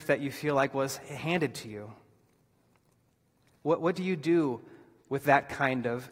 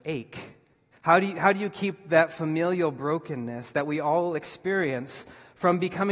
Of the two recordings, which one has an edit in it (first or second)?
second